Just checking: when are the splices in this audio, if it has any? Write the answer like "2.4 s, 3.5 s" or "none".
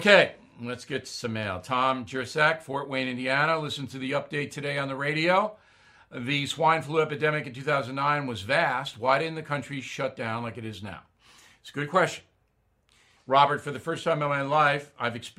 13.2 s